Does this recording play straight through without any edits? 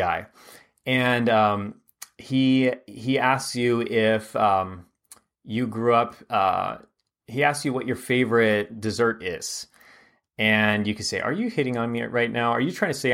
yes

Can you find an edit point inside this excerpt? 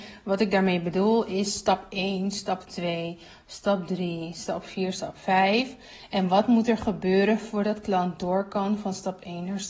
no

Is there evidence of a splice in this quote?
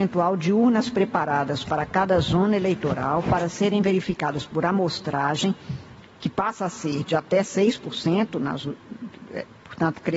yes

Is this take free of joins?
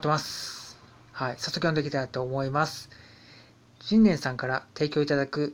yes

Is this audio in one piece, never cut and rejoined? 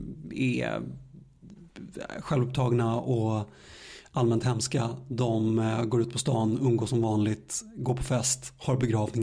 yes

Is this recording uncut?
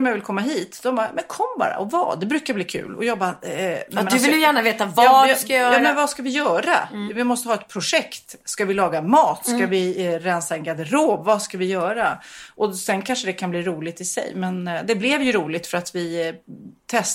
yes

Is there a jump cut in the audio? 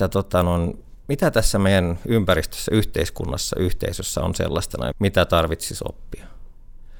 yes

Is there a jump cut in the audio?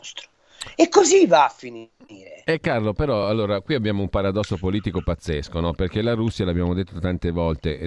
no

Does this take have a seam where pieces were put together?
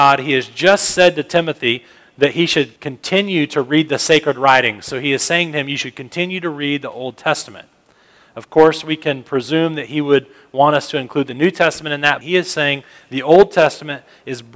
yes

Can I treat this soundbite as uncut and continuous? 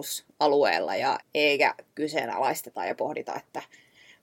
no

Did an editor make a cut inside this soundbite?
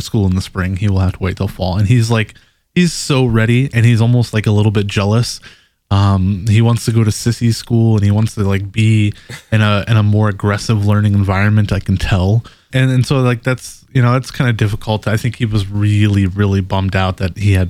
yes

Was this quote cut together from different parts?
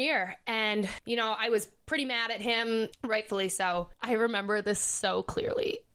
no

